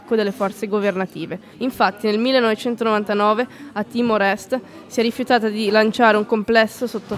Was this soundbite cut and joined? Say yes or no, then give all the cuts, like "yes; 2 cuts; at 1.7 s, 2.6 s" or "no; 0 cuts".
yes; 1 cut; at 1.5 s